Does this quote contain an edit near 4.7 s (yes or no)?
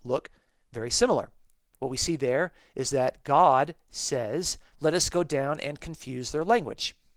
yes